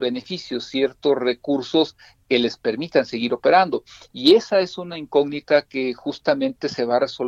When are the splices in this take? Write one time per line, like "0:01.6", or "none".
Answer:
none

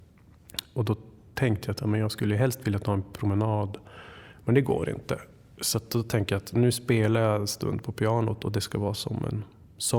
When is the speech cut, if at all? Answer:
none

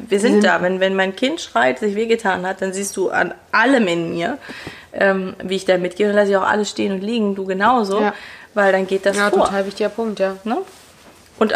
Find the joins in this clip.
none

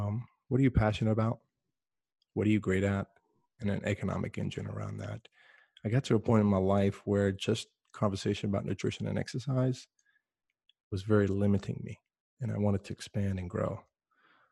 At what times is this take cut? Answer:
none

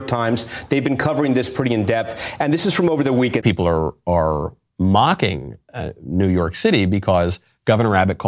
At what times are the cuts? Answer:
0:03.4

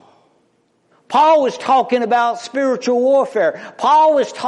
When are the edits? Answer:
0:00.9

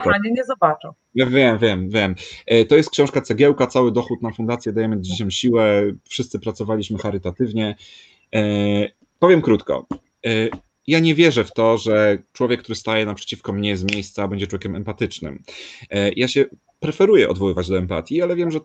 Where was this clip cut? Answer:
none

